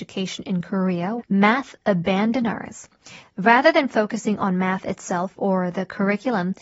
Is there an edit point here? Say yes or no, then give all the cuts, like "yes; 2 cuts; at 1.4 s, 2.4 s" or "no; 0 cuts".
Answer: yes; 2 cuts; at 1.2 s, 3.2 s